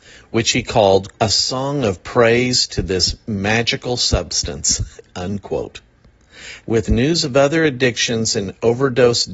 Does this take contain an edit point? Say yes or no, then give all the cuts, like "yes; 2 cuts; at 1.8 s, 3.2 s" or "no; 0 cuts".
yes; 2 cuts; at 1.1 s, 6.6 s